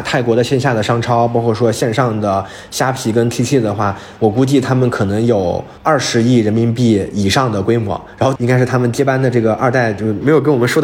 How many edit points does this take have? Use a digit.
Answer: 2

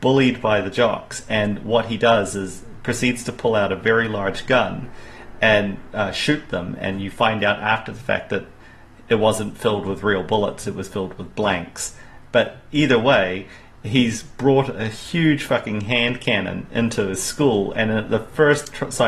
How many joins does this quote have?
0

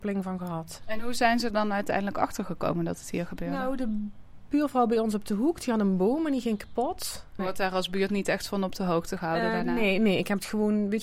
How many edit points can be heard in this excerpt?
2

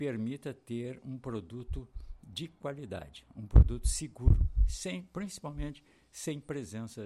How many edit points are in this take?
0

